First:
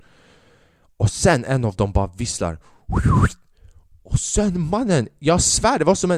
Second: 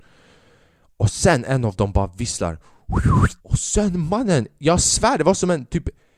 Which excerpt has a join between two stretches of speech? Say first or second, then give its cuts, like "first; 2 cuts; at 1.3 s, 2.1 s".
second; 1 cut; at 3.4 s